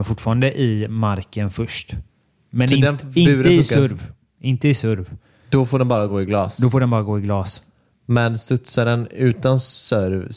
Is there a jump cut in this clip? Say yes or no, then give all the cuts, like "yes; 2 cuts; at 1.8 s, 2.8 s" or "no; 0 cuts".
no; 0 cuts